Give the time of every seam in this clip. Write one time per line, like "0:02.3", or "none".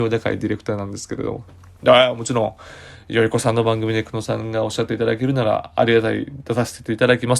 0:01.8